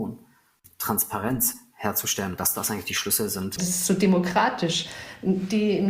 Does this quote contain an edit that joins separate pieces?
yes; 1 cut; at 3.6 s

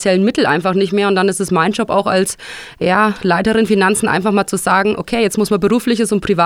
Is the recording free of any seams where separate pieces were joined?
yes; 0 cuts

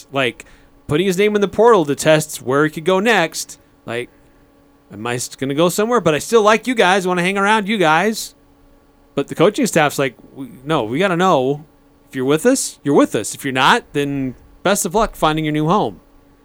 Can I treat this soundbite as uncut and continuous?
yes; 0 cuts

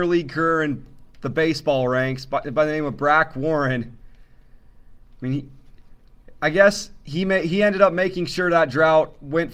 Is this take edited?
no; 0 cuts

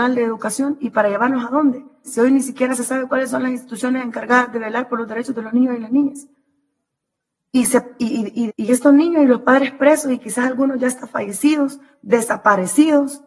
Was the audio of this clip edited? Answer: yes; 2 cuts; at 2.0 s, 8.5 s

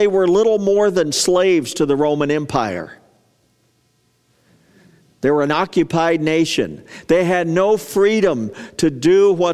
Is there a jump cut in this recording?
no; 0 cuts

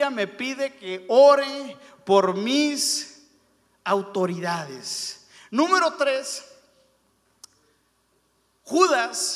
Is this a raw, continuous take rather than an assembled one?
yes; 0 cuts

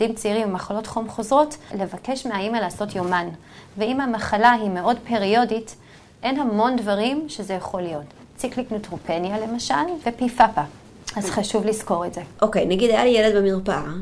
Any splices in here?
yes; 1 cut; at 10.0 s

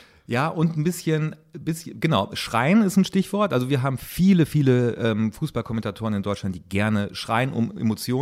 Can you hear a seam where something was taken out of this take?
no; 0 cuts

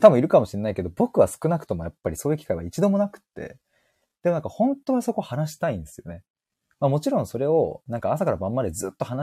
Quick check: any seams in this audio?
no; 0 cuts

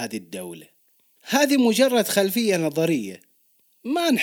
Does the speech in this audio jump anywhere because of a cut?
no; 0 cuts

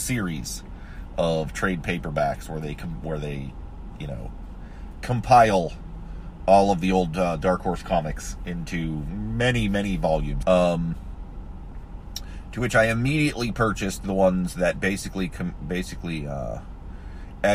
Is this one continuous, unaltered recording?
no; 1 cut; at 10.4 s

